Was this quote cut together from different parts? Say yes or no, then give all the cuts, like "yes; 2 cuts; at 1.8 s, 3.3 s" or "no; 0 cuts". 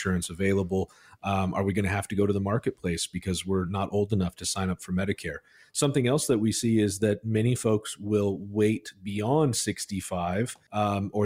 no; 0 cuts